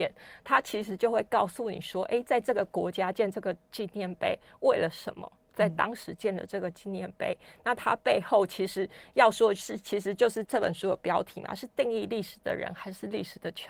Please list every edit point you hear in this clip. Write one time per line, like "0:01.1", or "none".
0:10.4